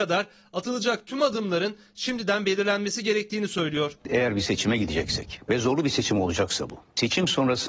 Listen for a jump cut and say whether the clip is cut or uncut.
uncut